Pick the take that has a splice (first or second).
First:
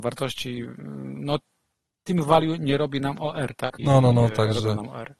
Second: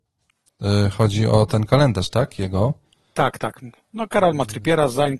first